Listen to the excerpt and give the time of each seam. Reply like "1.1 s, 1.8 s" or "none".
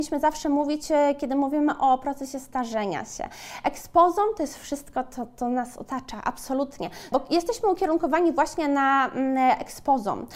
7.1 s